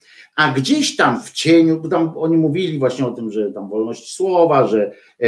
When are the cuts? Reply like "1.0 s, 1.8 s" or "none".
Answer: none